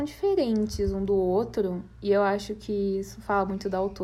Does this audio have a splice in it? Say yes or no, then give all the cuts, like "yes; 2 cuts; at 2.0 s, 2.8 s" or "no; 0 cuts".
no; 0 cuts